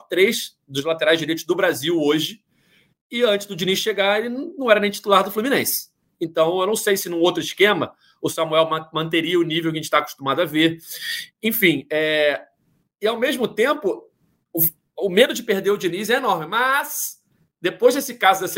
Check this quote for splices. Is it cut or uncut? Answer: uncut